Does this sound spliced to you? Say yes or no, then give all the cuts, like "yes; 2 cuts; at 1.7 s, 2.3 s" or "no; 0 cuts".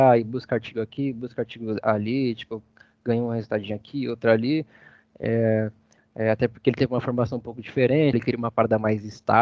yes; 2 cuts; at 6.0 s, 8.1 s